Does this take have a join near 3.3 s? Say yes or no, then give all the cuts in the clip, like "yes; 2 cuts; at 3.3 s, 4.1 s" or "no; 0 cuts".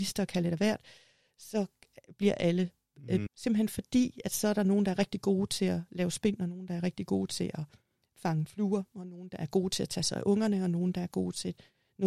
yes; 1 cut; at 3.3 s